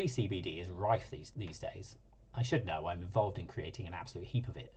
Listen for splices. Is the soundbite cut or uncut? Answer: cut